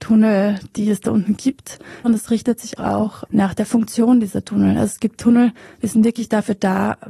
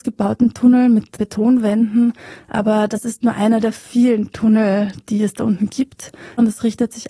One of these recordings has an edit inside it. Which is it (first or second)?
first